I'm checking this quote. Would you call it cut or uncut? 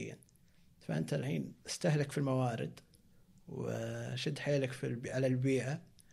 uncut